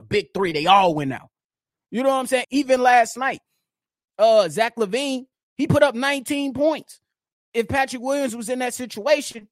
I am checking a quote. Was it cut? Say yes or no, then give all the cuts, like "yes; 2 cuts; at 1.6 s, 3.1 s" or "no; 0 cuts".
yes; 1 cut; at 2.4 s